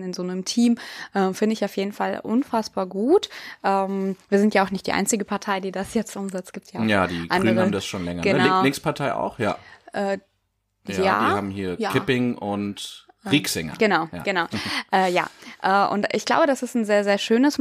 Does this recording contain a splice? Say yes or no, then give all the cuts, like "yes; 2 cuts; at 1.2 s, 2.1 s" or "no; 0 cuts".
no; 0 cuts